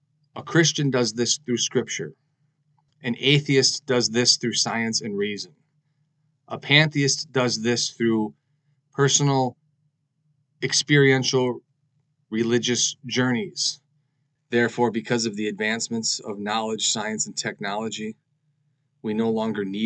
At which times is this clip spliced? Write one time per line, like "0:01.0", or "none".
0:14.4